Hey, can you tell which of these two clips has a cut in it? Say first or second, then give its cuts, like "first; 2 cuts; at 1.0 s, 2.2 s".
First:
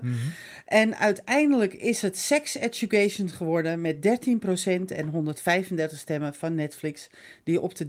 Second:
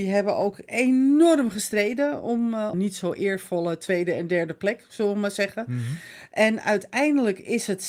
second; 1 cut; at 2.7 s